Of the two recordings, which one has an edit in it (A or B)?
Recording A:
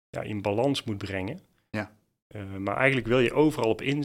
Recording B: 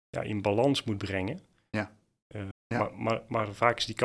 B